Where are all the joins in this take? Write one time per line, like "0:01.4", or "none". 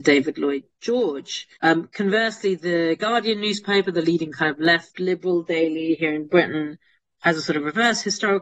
0:01.6